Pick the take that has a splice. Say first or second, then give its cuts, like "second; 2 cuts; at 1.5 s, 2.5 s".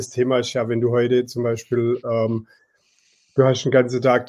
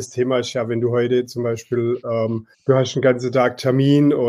second; 1 cut; at 2.5 s